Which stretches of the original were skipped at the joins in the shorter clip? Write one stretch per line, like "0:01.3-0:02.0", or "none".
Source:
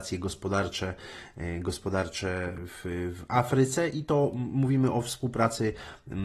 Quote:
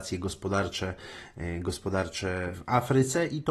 0:02.5-0:03.2